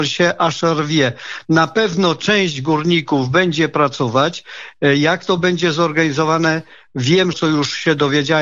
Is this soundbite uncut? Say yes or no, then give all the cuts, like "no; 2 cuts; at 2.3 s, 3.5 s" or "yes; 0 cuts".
no; 1 cut; at 7.3 s